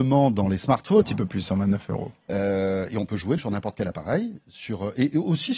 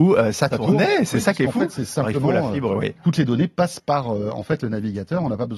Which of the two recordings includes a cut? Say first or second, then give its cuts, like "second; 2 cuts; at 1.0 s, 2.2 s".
first; 2 cuts; at 1.0 s, 3.4 s